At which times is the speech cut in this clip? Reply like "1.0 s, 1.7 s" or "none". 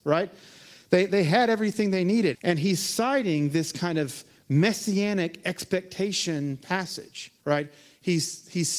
2.3 s, 7.4 s